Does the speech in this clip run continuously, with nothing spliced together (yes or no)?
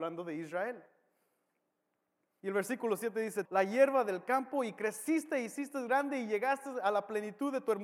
no